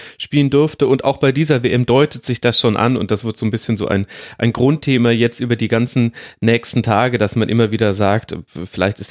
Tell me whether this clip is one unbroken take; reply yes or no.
yes